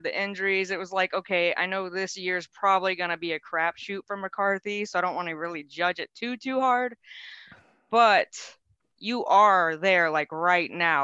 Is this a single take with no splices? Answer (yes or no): yes